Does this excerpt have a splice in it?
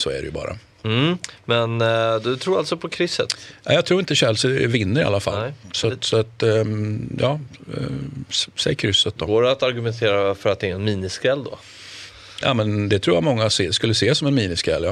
no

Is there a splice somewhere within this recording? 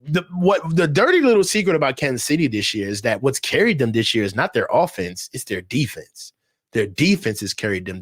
no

